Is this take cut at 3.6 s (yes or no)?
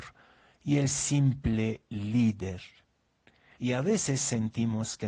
yes